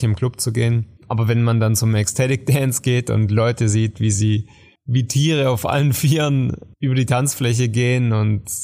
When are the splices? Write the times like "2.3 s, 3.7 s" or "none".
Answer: 1.0 s